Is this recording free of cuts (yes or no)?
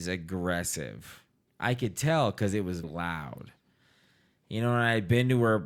no